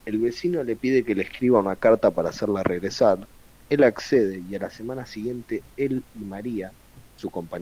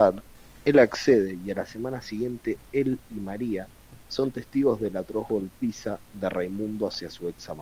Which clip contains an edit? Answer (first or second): second